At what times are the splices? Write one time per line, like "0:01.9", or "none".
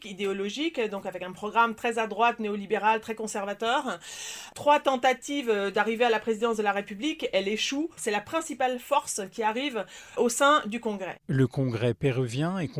0:08.0
0:10.2